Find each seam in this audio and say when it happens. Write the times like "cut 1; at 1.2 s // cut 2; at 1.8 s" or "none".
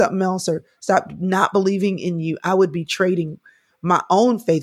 none